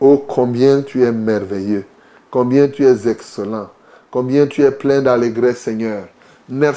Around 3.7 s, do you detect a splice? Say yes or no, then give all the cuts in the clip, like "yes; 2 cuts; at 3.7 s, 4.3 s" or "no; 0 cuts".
no; 0 cuts